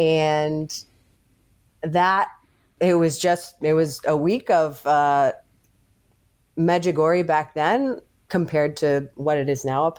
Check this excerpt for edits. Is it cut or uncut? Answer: uncut